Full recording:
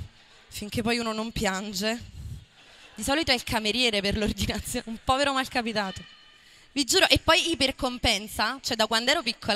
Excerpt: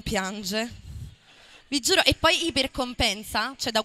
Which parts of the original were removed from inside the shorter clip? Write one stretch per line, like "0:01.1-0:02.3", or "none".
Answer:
0:02.9-0:06.6